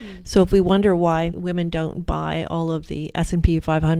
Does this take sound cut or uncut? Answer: cut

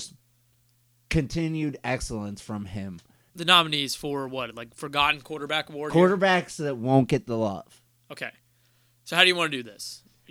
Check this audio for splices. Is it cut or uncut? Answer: cut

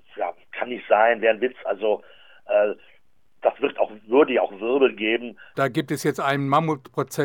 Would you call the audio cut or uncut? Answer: cut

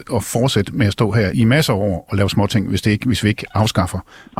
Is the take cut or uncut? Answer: cut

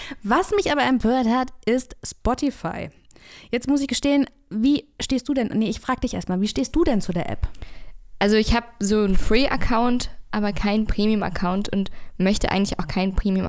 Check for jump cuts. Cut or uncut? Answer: uncut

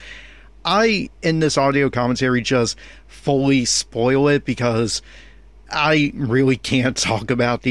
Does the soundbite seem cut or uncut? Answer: uncut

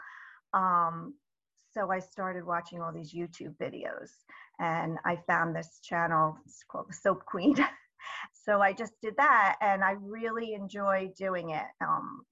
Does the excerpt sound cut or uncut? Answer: cut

